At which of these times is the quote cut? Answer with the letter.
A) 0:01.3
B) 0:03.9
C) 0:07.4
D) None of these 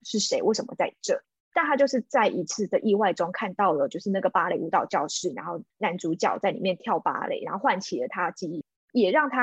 D